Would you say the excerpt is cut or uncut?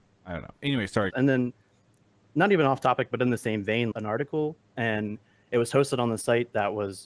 cut